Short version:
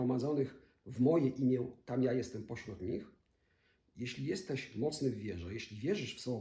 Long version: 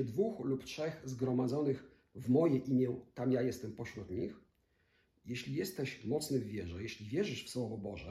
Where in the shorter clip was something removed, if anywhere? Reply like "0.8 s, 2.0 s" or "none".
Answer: none